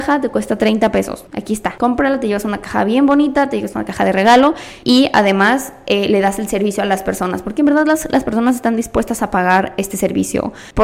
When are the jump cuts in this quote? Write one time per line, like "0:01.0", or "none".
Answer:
none